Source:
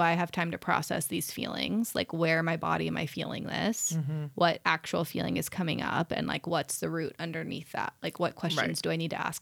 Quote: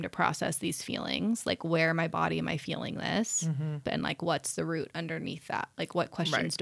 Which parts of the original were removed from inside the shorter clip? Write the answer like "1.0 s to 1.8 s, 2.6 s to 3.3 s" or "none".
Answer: 4.3 s to 6.1 s